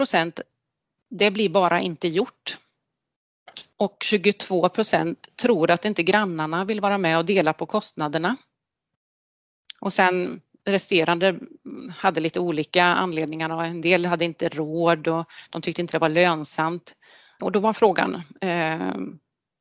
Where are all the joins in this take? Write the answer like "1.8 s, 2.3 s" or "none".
3.7 s, 17.4 s